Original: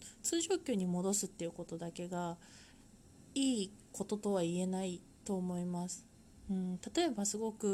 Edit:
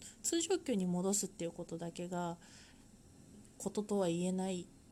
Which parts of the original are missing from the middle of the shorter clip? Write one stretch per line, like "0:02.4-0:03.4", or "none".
0:03.3-0:03.7